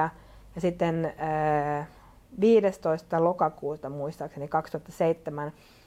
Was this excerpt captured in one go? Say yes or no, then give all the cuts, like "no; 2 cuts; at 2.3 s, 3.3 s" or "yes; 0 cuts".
yes; 0 cuts